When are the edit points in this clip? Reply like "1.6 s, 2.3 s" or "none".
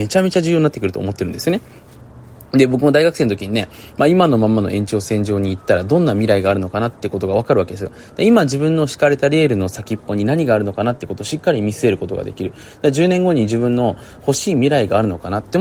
none